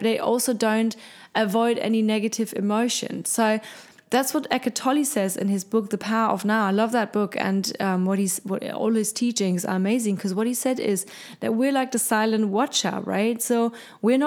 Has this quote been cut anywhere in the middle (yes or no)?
no